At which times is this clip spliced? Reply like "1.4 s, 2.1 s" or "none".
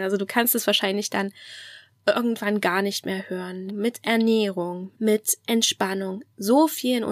3.7 s, 4.9 s